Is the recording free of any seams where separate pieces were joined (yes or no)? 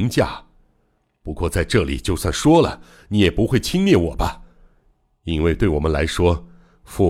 yes